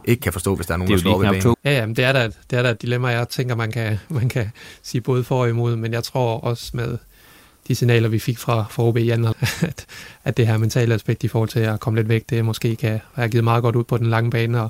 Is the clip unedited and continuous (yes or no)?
no